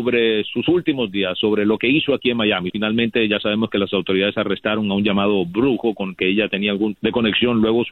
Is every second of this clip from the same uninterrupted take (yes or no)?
no